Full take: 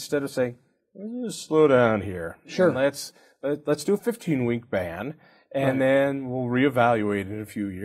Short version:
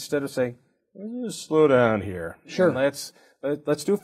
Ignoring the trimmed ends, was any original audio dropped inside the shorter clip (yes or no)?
no